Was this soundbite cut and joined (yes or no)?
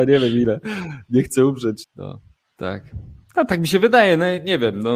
yes